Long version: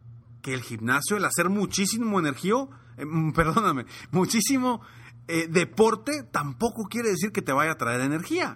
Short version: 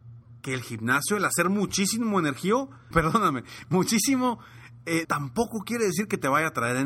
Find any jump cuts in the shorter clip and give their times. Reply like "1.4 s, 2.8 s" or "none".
2.9 s, 5.0 s